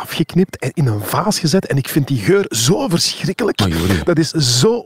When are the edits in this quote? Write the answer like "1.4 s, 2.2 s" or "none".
none